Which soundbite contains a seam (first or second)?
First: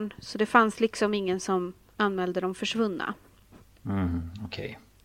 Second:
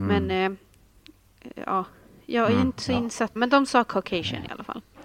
second